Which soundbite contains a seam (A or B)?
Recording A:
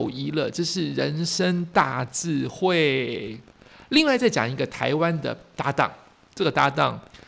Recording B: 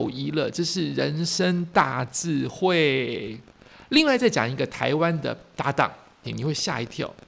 B